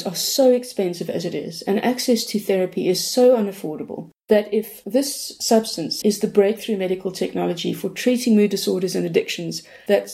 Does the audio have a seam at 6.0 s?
yes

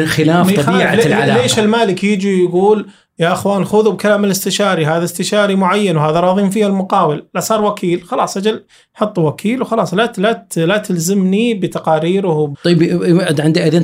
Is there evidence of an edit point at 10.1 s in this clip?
no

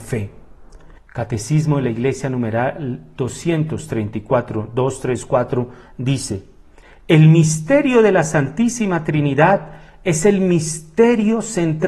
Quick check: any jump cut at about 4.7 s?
no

